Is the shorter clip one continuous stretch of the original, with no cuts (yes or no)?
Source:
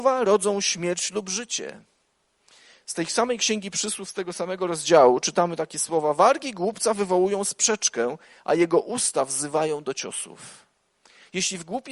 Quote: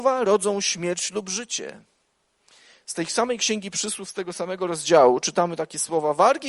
yes